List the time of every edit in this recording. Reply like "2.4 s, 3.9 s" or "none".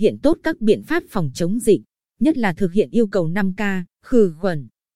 4.0 s